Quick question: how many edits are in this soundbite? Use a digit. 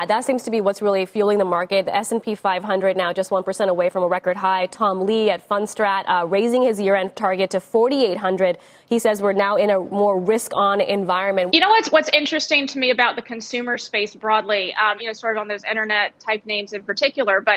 2